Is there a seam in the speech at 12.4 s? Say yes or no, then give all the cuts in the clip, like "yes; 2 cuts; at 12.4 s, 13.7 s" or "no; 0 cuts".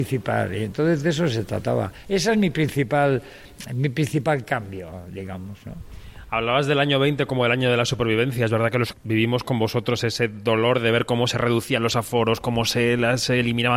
no; 1 cut; at 8.9 s